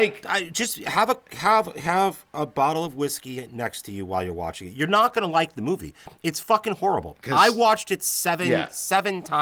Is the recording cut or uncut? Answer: uncut